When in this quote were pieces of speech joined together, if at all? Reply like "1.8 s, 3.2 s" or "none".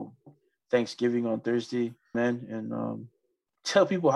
2.1 s